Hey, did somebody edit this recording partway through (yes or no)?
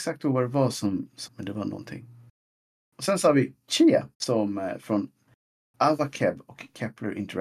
yes